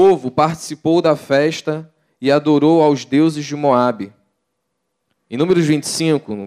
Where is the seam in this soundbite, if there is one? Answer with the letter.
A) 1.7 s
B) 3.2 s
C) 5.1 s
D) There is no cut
C